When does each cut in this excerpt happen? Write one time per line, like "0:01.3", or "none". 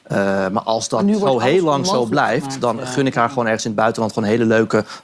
none